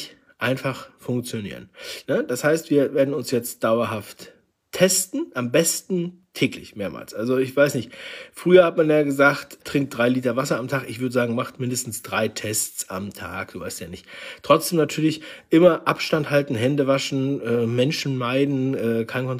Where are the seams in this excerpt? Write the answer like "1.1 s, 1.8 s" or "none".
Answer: 2.0 s, 9.6 s